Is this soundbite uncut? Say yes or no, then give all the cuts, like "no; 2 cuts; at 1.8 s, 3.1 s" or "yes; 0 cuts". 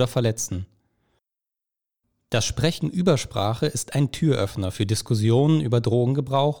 no; 1 cut; at 2.1 s